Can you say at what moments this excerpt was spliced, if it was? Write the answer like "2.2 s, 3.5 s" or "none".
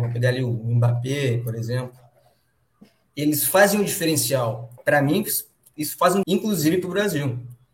4.8 s, 6.2 s